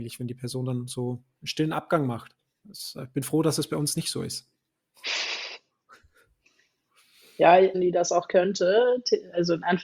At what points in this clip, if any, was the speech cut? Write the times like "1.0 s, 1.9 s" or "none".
2.6 s, 7.7 s